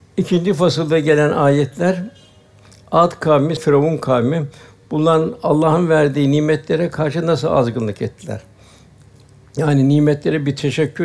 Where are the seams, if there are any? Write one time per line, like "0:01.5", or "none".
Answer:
0:03.6